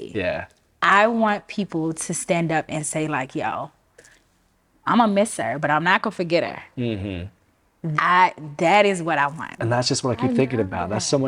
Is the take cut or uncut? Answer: cut